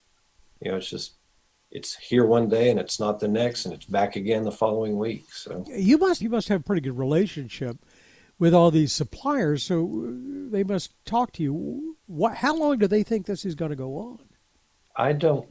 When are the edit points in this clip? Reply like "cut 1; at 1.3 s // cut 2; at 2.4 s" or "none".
cut 1; at 6.2 s